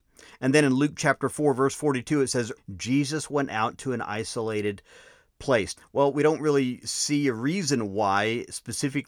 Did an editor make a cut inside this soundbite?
yes; 2 cuts; at 2.6 s, 5.8 s

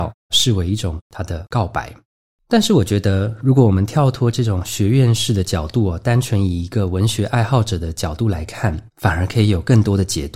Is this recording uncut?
yes; 0 cuts

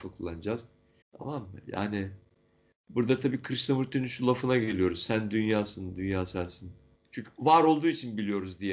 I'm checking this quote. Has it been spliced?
yes; 2 cuts; at 1.0 s, 6.9 s

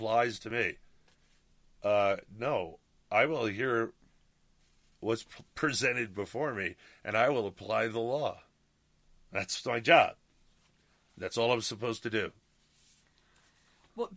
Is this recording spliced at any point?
no; 0 cuts

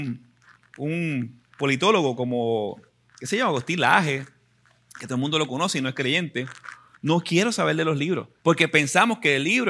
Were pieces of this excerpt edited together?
yes; 2 cuts; at 6.9 s, 8.4 s

